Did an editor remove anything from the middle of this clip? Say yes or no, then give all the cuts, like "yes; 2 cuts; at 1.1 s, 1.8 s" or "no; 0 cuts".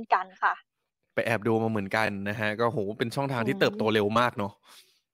no; 0 cuts